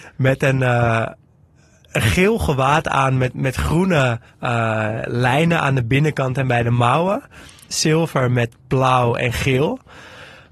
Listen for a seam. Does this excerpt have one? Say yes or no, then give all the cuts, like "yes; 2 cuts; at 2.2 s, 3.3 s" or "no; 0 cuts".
yes; 2 cuts; at 4.3 s, 7.7 s